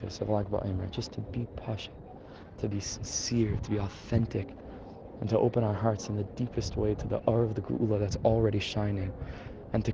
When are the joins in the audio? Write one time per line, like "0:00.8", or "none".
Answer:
0:02.6